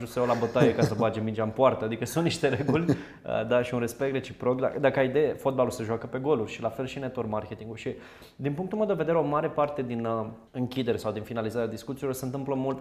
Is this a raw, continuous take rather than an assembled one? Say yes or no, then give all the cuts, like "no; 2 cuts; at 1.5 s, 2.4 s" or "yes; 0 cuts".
no; 1 cut; at 10.5 s